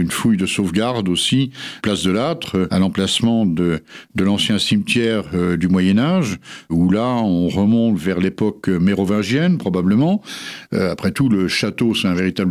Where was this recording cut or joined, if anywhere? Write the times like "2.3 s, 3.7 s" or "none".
10.7 s